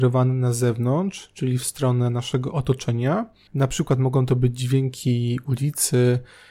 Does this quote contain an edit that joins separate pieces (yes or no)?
yes